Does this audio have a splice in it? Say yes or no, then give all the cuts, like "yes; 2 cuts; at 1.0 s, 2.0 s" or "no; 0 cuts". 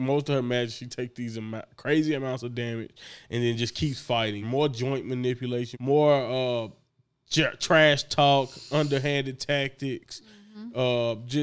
yes; 2 cuts; at 4.4 s, 5.7 s